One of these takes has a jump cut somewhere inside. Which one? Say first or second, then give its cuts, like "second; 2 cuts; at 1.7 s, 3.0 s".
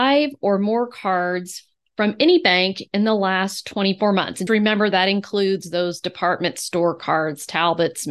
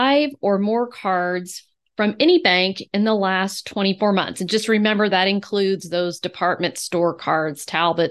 first; 1 cut; at 4.5 s